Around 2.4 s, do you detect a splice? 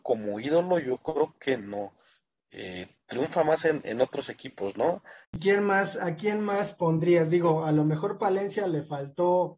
no; 1 cut; at 5.2 s

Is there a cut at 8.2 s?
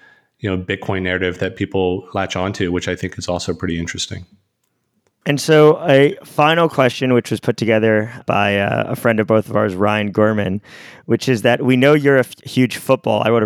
yes; 1 cut; at 8.2 s

